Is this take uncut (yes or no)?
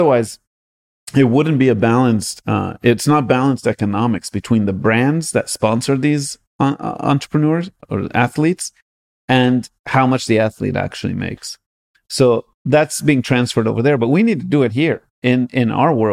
yes